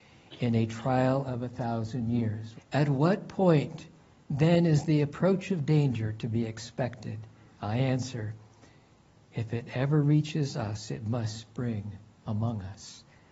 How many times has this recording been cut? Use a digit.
1